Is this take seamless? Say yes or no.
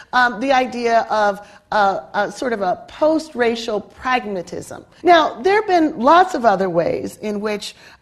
no